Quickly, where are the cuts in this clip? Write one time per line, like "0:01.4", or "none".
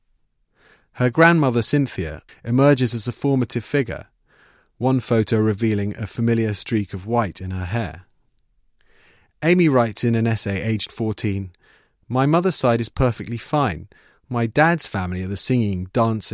0:02.3